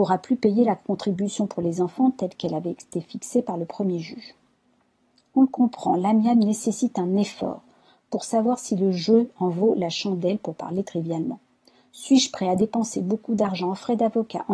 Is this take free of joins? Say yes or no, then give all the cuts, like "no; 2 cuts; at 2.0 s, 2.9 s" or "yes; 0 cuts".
yes; 0 cuts